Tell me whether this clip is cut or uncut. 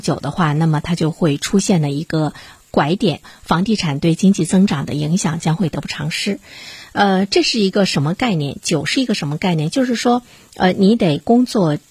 uncut